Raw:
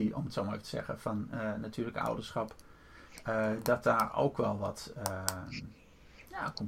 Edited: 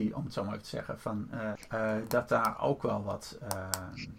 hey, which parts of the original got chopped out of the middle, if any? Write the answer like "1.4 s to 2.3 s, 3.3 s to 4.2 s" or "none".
1.6 s to 3.1 s